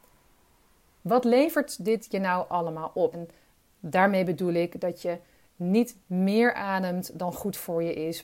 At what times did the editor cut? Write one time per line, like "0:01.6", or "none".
0:03.1